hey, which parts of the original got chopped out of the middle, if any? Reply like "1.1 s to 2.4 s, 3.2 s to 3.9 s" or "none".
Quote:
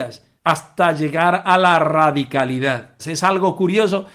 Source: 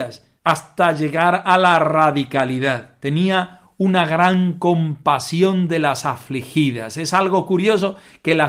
3.0 s to 6.9 s